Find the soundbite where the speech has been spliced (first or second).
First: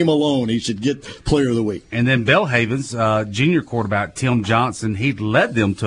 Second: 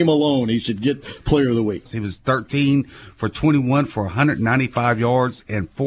second